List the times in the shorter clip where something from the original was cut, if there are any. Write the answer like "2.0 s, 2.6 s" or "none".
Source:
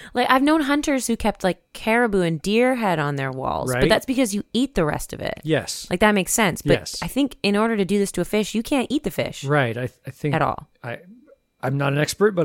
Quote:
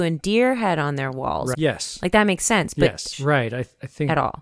1.5 s, 3.1 s